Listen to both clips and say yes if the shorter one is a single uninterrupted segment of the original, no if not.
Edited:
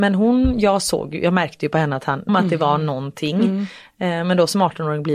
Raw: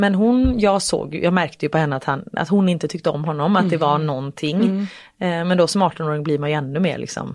no